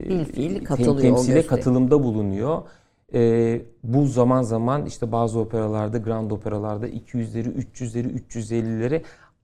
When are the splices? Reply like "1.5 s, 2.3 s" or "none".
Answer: none